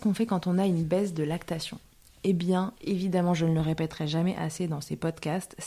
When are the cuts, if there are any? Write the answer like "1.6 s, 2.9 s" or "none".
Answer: 2.8 s